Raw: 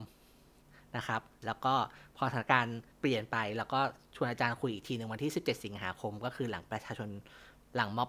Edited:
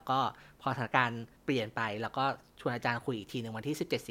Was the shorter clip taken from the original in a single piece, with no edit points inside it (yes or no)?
yes